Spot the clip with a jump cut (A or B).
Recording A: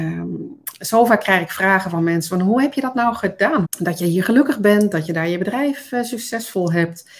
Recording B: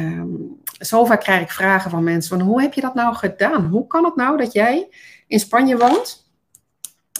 A